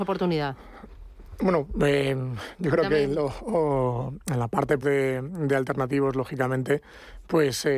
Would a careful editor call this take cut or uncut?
cut